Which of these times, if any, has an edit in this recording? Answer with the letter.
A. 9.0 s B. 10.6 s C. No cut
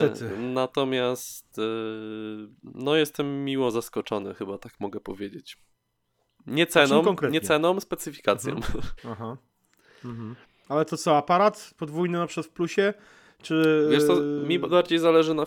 A